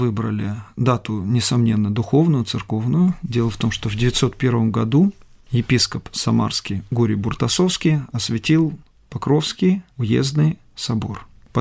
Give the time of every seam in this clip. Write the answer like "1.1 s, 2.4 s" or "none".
9.9 s